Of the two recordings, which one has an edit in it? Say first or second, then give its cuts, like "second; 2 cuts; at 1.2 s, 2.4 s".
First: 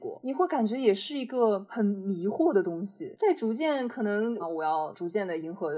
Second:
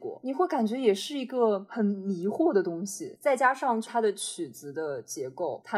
first; 2 cuts; at 3.2 s, 4.4 s